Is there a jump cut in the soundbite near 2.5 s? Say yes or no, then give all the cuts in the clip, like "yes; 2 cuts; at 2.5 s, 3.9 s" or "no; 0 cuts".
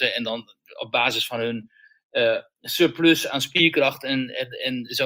no; 0 cuts